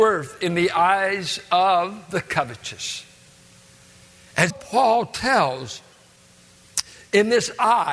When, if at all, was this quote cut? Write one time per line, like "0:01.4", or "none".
0:04.5